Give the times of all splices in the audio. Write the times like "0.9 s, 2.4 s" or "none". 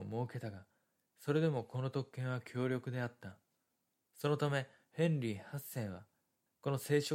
none